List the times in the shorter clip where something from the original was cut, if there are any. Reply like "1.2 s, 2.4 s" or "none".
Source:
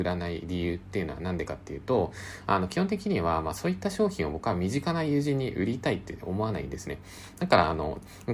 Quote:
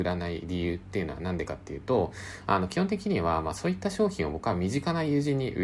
none